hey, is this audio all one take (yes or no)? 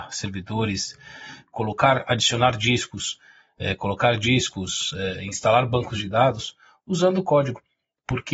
yes